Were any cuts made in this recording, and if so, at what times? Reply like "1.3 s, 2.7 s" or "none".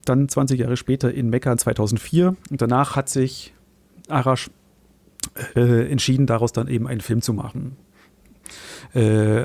none